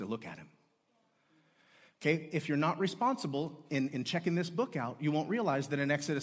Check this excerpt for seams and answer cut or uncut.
uncut